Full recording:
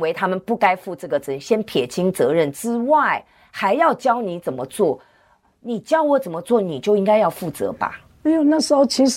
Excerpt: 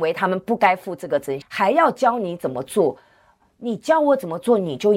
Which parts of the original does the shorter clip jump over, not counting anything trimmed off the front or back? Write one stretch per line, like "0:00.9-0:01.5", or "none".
0:01.4-0:03.4

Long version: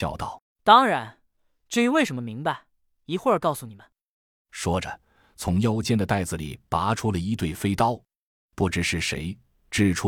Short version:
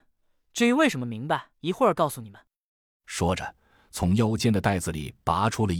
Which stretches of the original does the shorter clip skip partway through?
0:02.7-0:03.0

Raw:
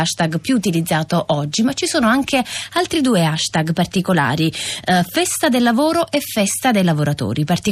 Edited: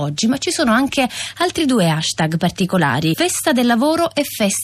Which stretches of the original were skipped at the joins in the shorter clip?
0:04.5-0:05.1

